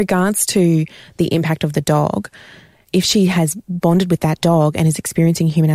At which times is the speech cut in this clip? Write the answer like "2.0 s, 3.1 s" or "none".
2.8 s